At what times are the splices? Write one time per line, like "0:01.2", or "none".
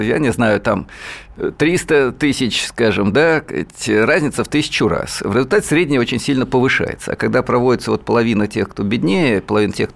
none